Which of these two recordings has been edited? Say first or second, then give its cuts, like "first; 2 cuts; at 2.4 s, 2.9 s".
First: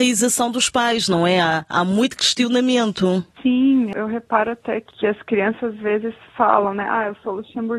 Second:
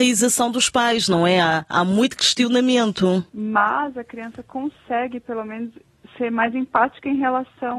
second; 1 cut; at 3.3 s